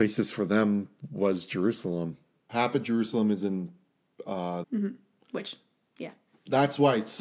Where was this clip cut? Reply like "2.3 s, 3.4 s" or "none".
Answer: 2.5 s, 4.6 s